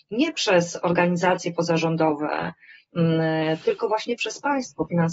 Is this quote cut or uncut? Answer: uncut